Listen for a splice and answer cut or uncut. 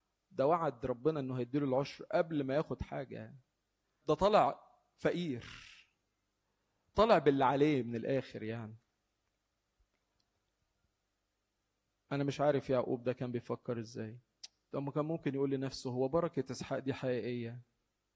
cut